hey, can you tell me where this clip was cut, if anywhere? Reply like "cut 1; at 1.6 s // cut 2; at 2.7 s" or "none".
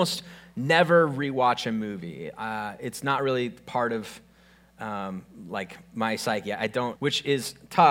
cut 1; at 7.0 s